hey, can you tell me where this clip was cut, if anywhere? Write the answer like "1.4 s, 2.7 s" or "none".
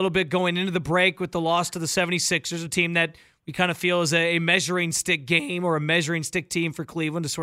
none